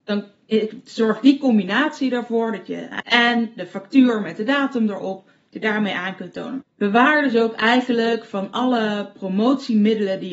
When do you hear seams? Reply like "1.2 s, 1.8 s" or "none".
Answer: 3.0 s, 6.6 s